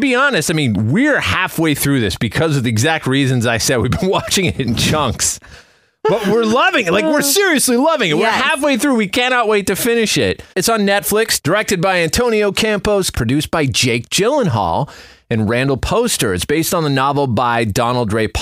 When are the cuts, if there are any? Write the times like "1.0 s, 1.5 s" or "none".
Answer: 10.5 s, 13.1 s